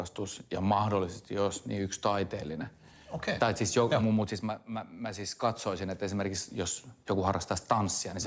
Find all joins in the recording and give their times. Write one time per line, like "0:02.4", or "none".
none